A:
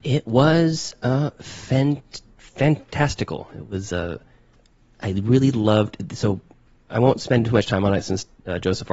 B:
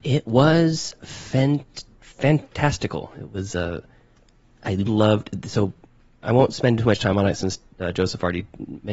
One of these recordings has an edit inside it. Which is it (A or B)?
B